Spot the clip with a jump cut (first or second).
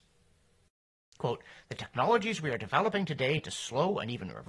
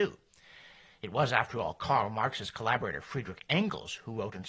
first